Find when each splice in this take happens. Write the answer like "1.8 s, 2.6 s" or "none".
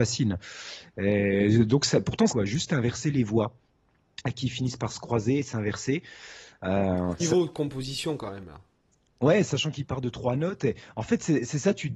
2.3 s, 7.2 s